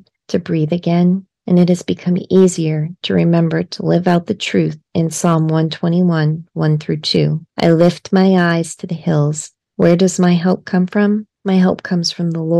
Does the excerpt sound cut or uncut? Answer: cut